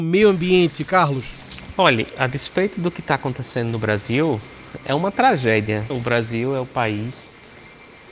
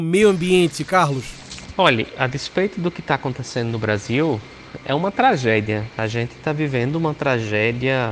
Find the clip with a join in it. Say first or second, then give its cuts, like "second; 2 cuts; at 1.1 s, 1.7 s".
first; 1 cut; at 5.9 s